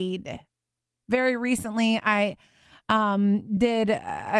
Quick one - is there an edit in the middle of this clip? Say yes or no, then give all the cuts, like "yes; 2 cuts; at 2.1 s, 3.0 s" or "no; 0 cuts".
no; 0 cuts